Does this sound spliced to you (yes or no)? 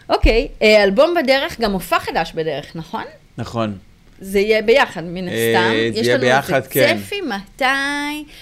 no